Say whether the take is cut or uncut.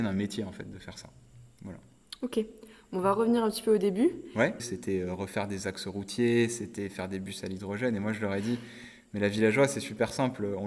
cut